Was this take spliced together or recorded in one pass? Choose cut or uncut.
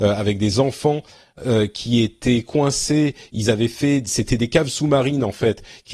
uncut